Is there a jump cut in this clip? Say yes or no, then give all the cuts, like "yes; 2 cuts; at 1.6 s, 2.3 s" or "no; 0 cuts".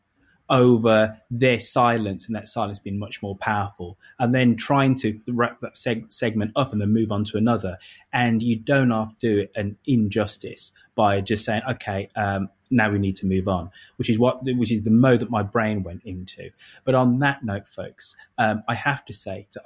no; 0 cuts